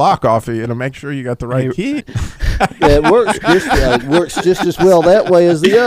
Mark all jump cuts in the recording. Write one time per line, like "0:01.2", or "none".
0:02.0

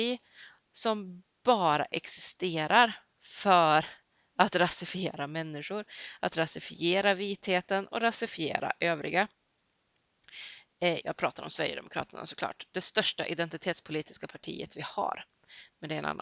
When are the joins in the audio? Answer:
0:11.0

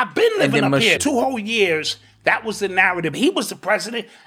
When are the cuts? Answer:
0:01.0
0:03.1

